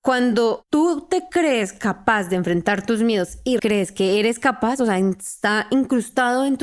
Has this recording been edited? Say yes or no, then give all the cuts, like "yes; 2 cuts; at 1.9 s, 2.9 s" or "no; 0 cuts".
yes; 1 cut; at 3.6 s